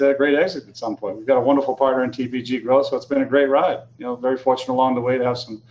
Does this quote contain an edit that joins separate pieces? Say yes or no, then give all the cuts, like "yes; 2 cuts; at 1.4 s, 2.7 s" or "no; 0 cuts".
no; 0 cuts